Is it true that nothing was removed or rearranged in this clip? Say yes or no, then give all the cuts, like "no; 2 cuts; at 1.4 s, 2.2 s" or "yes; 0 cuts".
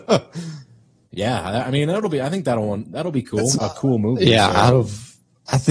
no; 2 cuts; at 1.1 s, 3.6 s